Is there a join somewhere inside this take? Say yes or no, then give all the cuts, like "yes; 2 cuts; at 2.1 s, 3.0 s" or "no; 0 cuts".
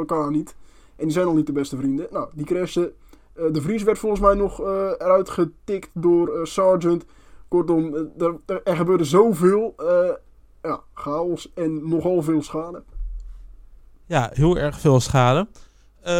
no; 0 cuts